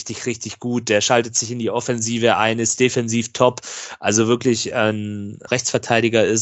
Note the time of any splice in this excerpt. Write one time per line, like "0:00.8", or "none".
0:05.5